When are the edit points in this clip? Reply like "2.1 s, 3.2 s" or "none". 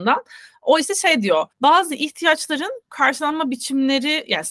1.5 s